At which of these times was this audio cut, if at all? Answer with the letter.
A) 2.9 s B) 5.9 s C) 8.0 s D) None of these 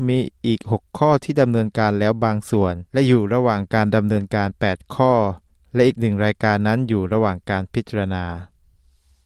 A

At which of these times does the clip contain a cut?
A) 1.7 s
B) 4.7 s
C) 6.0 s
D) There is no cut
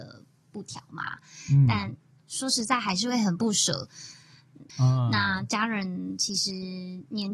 B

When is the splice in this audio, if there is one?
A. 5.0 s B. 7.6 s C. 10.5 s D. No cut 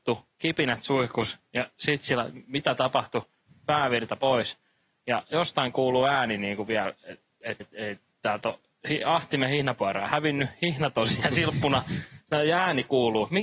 B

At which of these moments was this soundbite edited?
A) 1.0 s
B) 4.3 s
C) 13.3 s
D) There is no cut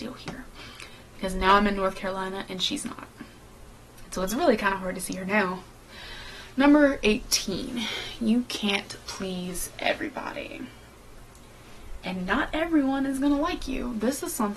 D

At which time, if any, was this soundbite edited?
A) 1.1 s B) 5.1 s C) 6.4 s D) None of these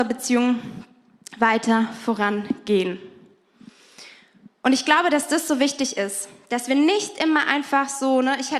D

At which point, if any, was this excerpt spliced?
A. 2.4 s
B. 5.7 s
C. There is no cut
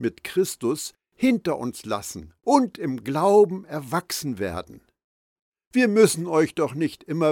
A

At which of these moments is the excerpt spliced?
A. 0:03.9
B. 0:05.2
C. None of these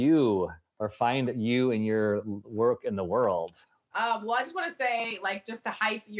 A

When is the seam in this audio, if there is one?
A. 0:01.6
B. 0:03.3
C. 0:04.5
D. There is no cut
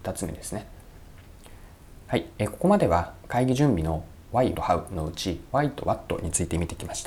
C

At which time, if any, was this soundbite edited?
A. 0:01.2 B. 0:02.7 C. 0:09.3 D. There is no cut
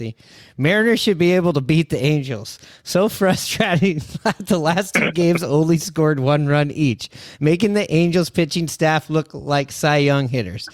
D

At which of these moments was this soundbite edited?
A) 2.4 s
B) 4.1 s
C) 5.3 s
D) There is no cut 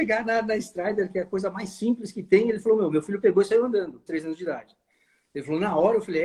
B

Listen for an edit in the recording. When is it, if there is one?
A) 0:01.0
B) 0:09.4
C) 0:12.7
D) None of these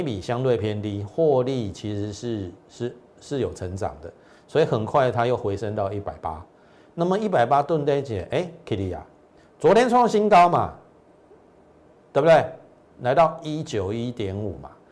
D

